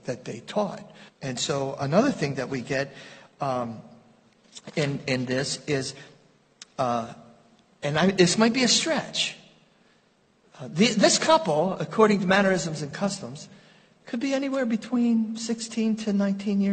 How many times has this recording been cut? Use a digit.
1